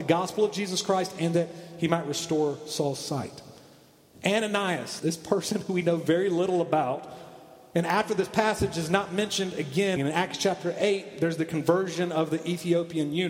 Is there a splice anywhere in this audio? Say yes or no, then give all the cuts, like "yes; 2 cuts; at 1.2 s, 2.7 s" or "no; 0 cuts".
yes; 2 cuts; at 5.0 s, 10.0 s